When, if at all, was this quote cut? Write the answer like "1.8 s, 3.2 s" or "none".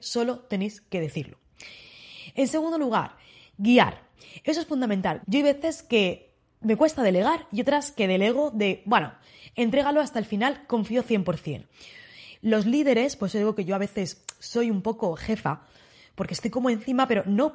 5.2 s, 12.3 s